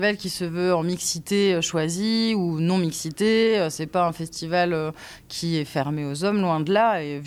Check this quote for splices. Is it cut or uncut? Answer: uncut